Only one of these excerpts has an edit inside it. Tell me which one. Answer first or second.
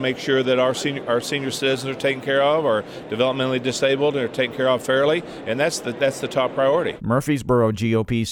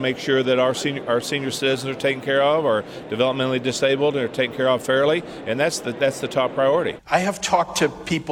second